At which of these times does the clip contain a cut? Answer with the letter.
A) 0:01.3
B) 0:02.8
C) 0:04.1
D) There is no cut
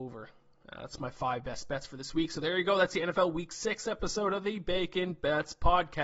D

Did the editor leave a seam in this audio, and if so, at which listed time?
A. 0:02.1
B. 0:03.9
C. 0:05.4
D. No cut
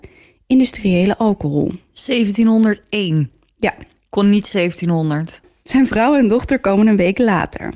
C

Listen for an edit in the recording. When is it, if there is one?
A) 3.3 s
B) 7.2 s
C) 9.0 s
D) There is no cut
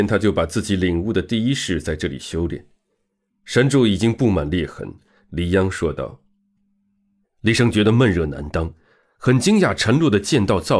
B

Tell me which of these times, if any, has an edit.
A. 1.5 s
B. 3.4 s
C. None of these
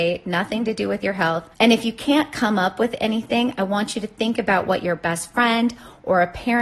A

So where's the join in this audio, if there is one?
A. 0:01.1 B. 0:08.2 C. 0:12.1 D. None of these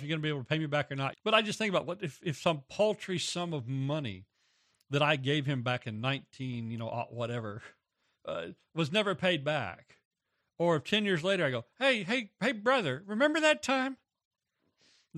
A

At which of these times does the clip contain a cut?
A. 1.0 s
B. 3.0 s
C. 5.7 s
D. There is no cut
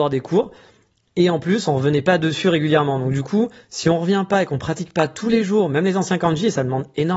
D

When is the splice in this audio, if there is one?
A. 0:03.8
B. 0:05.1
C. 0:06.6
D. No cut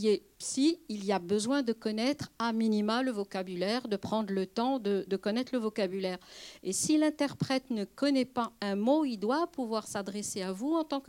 B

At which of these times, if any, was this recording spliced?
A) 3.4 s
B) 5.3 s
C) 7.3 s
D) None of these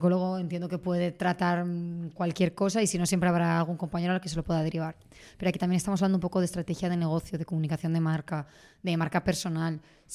D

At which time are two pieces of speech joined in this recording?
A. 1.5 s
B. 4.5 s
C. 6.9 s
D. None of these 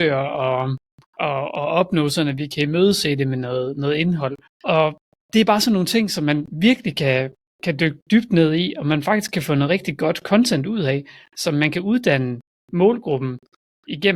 B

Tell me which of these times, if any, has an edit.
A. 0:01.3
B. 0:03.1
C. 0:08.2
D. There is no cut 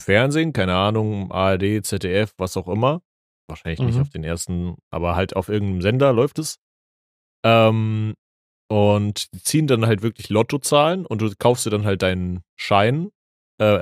D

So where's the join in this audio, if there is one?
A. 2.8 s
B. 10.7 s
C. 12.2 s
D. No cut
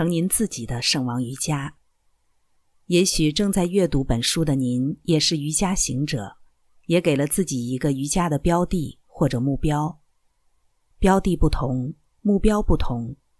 D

